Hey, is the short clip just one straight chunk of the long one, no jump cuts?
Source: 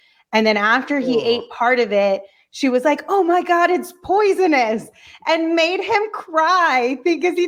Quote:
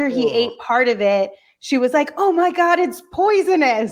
yes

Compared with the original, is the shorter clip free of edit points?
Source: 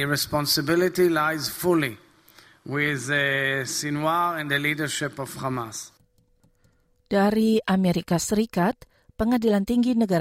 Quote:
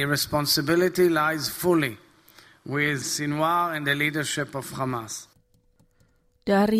no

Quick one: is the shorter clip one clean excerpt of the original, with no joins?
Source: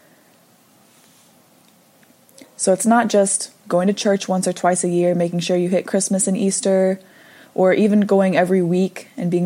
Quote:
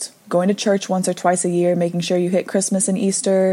yes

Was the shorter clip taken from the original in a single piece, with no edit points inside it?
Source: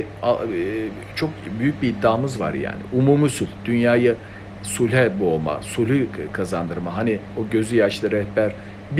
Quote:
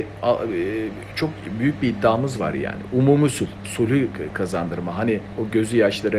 no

